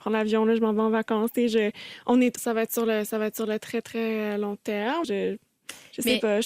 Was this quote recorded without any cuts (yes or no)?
no